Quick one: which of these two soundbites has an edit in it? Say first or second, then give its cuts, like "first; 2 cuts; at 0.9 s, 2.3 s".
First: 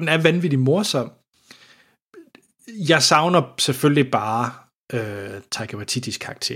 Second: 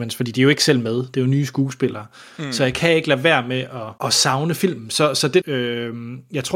second; 2 cuts; at 4.0 s, 5.4 s